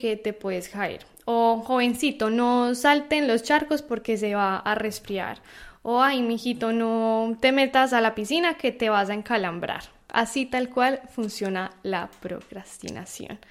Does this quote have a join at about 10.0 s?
yes; 1 cut; at 10.0 s

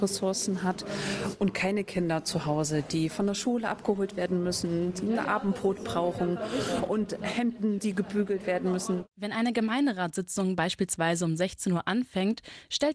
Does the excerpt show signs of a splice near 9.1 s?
no; 0 cuts

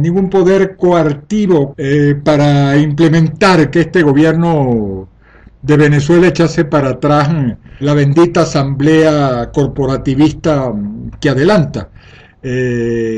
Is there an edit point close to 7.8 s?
yes; 2 cuts; at 1.7 s, 7.8 s

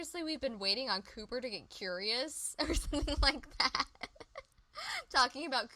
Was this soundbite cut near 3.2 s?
no; 0 cuts

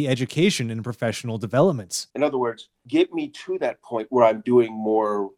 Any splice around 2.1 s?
yes; 1 cut; at 2.1 s

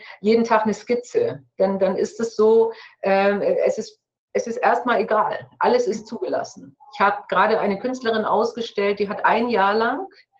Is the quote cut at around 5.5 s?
no; 0 cuts

